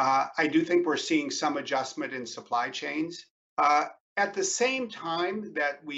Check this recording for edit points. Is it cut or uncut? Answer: cut